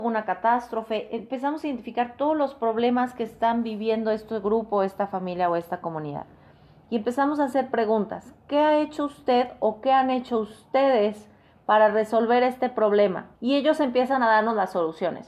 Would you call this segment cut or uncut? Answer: cut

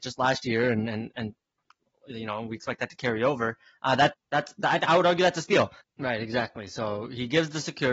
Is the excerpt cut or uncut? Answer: cut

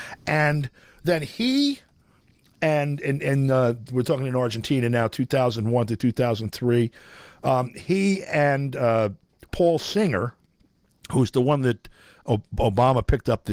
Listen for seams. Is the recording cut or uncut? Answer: uncut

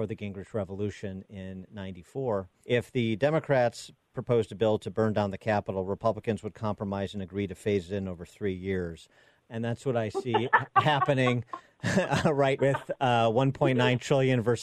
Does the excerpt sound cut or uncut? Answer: cut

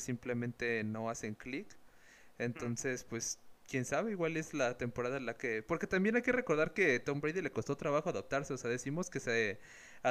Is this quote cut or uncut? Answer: uncut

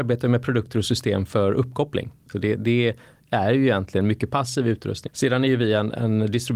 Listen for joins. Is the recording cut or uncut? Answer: cut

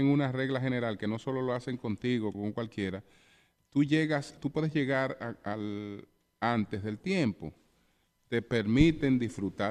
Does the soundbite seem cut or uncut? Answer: cut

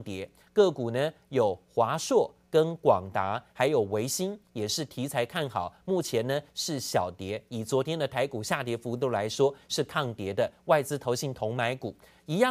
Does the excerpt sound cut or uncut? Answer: uncut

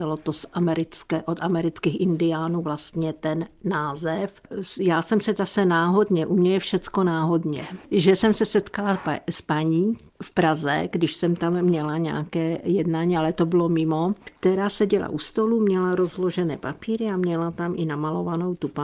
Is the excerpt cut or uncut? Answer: uncut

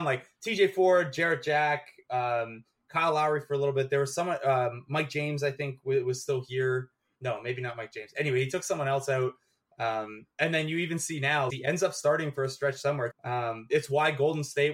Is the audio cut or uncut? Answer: cut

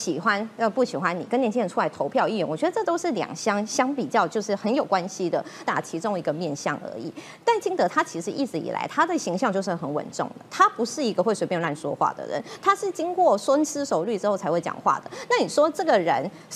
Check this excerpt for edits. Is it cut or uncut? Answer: cut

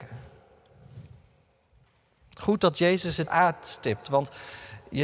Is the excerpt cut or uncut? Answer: cut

